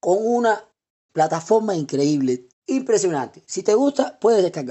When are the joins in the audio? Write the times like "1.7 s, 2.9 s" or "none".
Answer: 1.1 s, 2.5 s